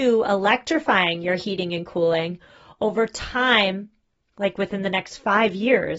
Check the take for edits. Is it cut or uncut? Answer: uncut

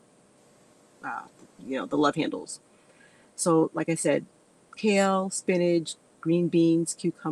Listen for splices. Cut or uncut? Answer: uncut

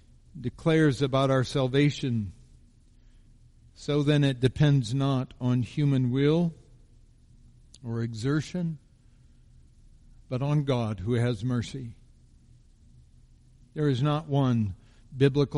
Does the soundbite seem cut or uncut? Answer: uncut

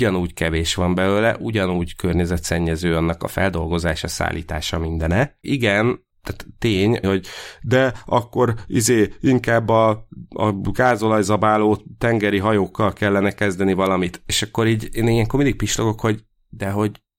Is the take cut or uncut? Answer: cut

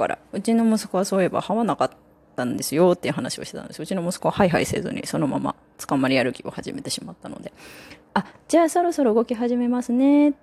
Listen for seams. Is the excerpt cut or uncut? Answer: cut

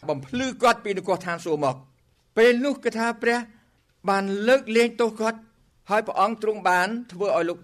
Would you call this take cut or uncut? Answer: uncut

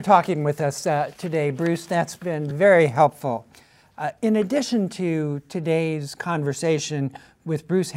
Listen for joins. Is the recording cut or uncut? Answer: uncut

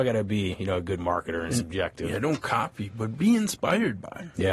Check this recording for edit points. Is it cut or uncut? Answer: uncut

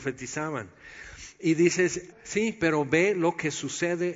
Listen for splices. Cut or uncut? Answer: cut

